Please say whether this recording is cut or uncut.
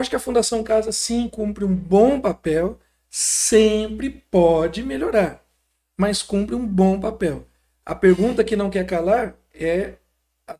uncut